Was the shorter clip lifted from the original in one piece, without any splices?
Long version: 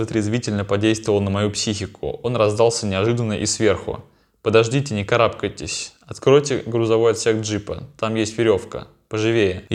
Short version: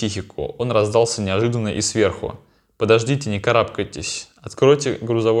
yes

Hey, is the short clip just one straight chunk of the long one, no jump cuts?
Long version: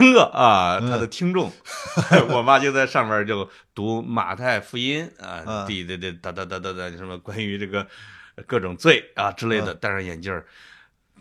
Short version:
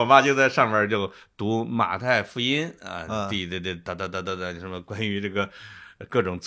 yes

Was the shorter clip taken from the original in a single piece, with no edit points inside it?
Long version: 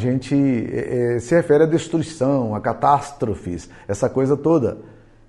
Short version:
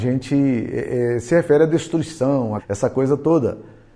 no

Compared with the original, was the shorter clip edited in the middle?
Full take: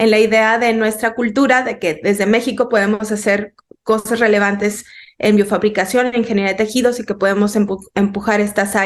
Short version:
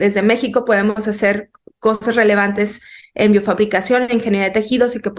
no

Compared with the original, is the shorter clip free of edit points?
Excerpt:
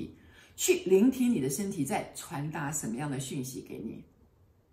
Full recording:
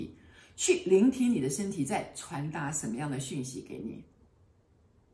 yes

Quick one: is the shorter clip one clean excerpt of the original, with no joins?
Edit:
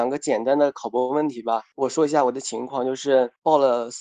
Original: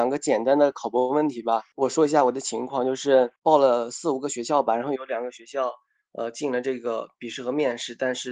yes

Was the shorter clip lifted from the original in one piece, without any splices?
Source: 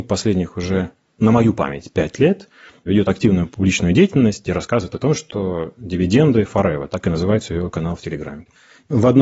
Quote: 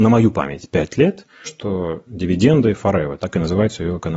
no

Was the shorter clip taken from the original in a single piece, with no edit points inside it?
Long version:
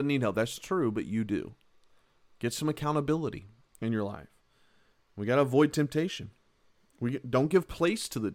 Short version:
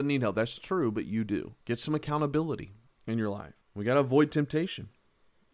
no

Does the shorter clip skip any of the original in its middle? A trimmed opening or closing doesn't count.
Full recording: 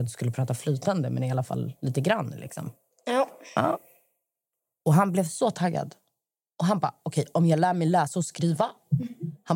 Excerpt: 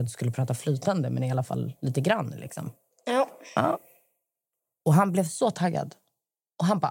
no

